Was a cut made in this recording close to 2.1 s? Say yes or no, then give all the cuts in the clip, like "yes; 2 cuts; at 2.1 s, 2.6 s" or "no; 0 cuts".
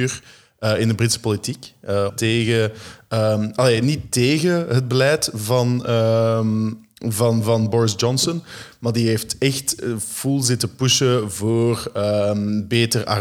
yes; 1 cut; at 2.1 s